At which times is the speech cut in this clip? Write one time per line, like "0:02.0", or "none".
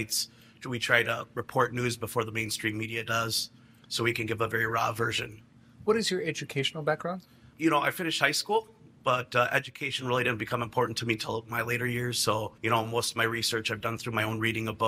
0:07.5
0:12.6